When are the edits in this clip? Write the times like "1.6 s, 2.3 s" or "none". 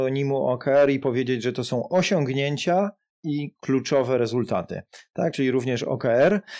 none